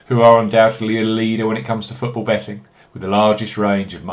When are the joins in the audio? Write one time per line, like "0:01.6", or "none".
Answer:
0:02.8